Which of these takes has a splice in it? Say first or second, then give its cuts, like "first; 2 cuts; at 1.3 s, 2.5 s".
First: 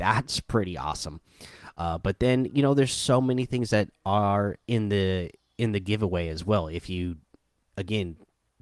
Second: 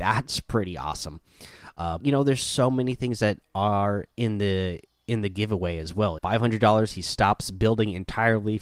second; 2 cuts; at 2.0 s, 6.2 s